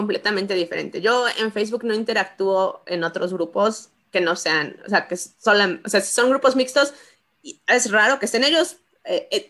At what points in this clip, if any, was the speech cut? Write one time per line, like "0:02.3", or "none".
none